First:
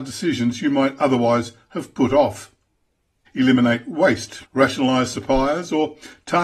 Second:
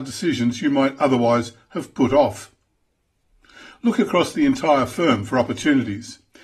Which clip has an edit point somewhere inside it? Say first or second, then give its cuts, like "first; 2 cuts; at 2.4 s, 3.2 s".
first; 2 cuts; at 3.3 s, 4.5 s